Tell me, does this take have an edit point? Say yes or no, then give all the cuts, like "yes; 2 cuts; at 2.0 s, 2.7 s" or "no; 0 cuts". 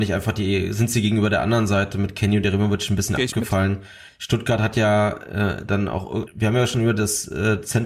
yes; 2 cuts; at 4.1 s, 6.3 s